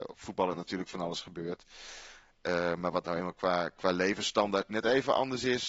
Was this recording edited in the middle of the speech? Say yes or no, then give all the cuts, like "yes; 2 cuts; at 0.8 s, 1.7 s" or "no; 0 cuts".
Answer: no; 0 cuts